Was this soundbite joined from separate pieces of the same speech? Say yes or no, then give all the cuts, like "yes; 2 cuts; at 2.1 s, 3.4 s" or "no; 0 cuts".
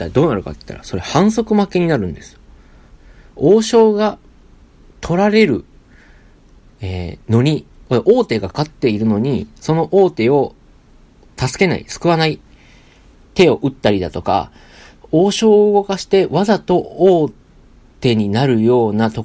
yes; 1 cut; at 8.5 s